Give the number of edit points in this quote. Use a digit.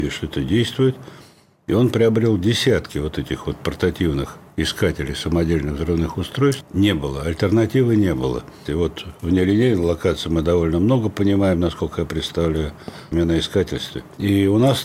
3